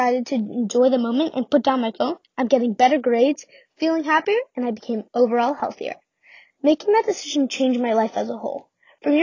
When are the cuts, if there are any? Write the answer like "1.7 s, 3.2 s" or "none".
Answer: none